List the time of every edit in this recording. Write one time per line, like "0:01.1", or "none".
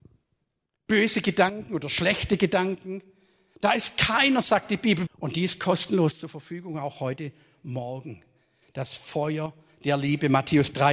0:05.1